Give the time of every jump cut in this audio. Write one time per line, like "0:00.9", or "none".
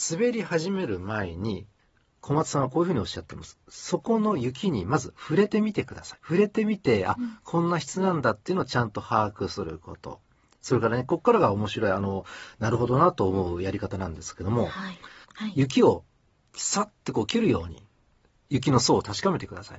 0:06.2
0:15.2